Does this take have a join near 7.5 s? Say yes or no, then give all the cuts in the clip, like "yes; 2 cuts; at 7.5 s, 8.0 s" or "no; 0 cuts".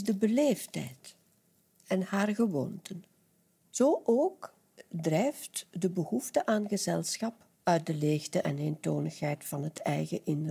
yes; 2 cuts; at 3.5 s, 7.5 s